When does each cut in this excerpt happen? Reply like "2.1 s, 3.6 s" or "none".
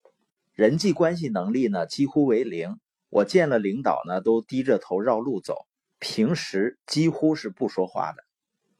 5.9 s